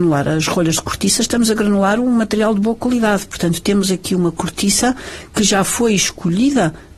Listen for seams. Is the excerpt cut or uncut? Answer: uncut